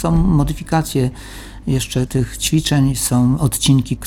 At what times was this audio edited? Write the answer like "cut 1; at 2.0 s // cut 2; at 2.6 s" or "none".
cut 1; at 2.1 s